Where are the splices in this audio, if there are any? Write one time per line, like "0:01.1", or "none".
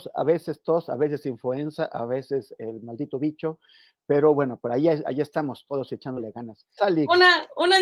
0:06.8